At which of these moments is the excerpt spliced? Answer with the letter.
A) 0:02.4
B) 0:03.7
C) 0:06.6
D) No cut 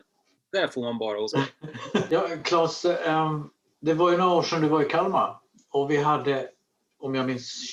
D